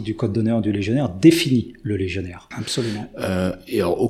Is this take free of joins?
no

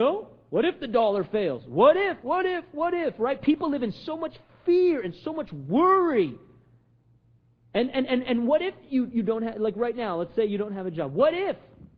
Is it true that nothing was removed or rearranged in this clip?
no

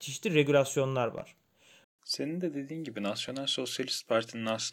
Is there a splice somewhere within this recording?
yes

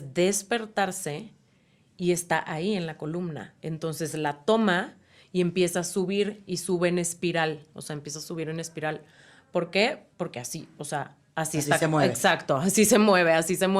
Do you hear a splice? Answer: no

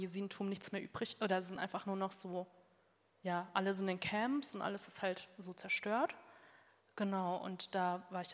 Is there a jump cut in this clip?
no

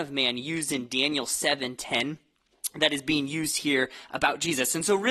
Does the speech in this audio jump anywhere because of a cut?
no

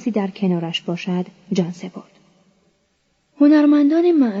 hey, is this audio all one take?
no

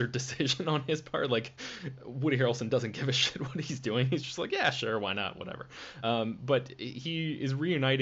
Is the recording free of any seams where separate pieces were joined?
yes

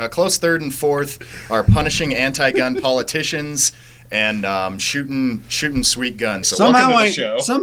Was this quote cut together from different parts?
yes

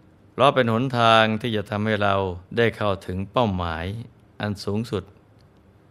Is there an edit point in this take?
yes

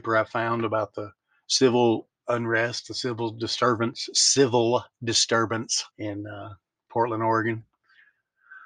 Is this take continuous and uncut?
no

